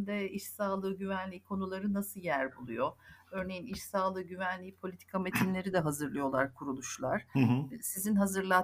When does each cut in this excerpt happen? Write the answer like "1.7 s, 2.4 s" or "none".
none